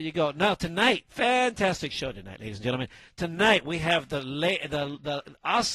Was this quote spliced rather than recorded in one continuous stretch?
yes; 1 cut; at 1.1 s

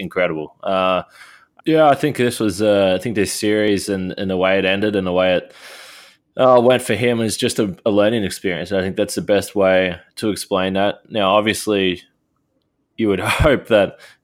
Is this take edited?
yes; 1 cut; at 1.6 s

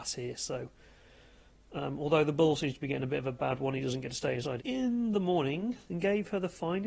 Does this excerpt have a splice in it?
yes; 2 cuts; at 4.6 s, 5.9 s

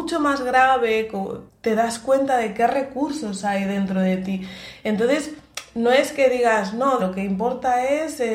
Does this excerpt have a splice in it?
yes; 2 cuts; at 1.5 s, 7.0 s

